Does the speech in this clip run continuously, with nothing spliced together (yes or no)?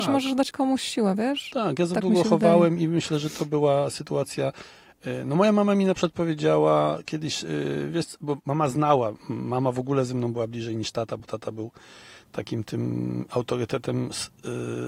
yes